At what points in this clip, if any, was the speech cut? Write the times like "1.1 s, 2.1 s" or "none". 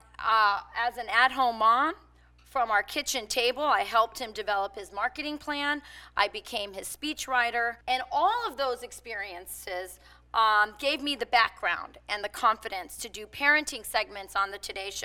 7.8 s